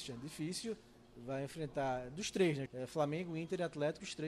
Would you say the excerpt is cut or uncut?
cut